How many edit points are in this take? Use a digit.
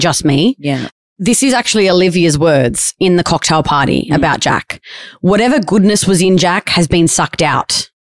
0